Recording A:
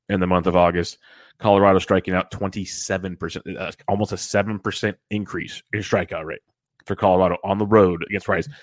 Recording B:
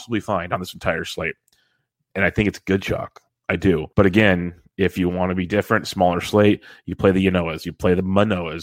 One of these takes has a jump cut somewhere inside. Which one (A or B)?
B